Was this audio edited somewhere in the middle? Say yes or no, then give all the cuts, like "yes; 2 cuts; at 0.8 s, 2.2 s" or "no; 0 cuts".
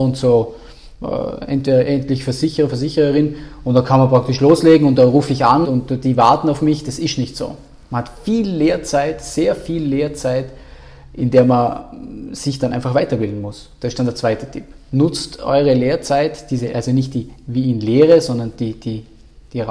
yes; 1 cut; at 5.6 s